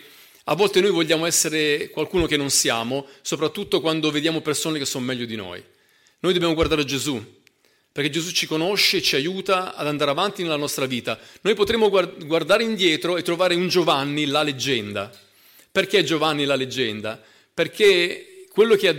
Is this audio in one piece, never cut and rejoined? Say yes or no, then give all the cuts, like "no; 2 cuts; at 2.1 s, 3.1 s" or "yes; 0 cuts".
yes; 0 cuts